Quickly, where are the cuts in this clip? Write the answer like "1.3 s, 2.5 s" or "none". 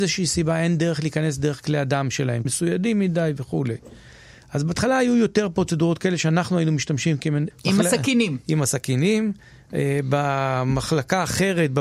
2.4 s, 7.5 s

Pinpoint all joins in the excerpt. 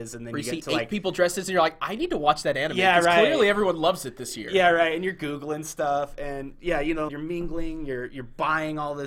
7.1 s

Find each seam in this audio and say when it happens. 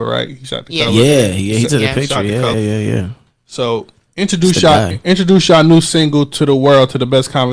2.5 s

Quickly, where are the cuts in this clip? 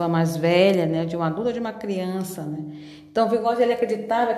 none

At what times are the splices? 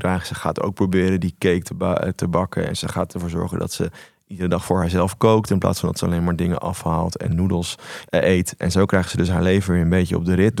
8.0 s

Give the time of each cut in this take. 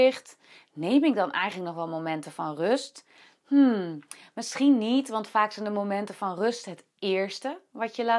none

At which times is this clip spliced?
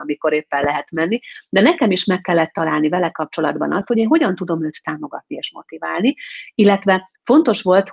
none

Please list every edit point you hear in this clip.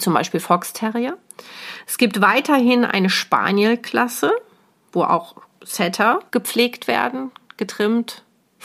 6.3 s

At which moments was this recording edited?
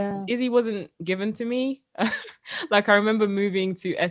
none

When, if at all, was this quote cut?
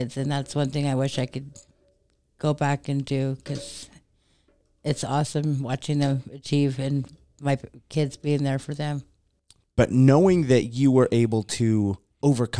none

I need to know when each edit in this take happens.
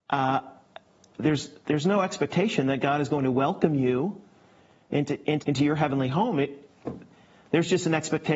5.4 s

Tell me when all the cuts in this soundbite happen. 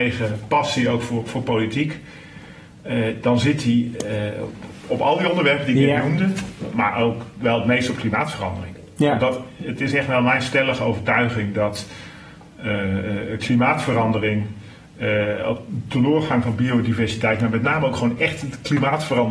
none

